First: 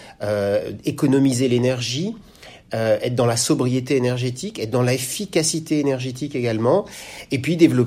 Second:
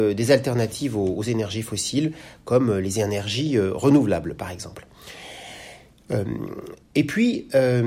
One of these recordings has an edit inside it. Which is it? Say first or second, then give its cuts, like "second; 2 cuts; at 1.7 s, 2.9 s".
second; 1 cut; at 6.8 s